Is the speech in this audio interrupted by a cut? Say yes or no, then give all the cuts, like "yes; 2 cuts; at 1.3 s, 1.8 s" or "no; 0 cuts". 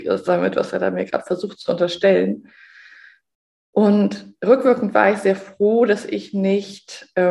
no; 0 cuts